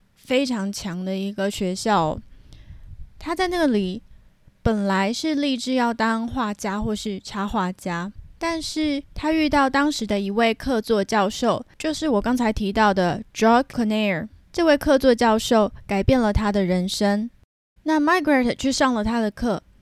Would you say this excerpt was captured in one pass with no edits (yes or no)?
no